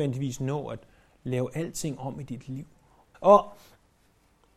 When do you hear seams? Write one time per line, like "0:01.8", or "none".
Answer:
0:03.1